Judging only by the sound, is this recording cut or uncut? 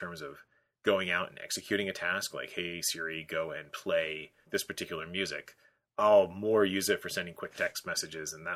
cut